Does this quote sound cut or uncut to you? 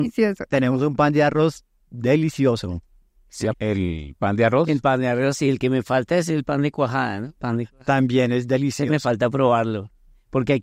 cut